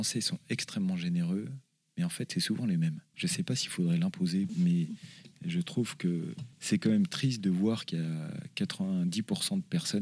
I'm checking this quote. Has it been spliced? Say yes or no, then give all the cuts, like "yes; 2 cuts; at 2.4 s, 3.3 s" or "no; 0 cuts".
yes; 3 cuts; at 3.1 s, 4.5 s, 6.5 s